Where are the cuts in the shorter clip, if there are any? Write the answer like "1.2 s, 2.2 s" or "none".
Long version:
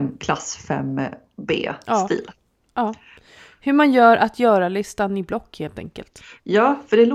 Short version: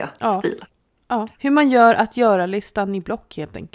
1.3 s